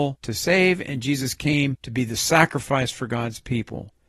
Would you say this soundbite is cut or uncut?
uncut